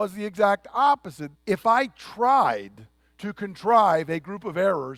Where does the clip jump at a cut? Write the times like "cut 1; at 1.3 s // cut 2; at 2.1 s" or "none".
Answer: cut 1; at 1.3 s